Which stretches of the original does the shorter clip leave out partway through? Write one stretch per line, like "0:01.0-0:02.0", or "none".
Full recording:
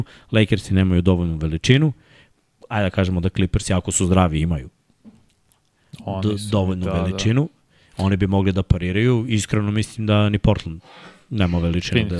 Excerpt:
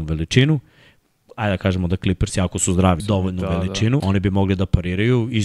0:04.3-0:06.4
0:07.4-0:08.0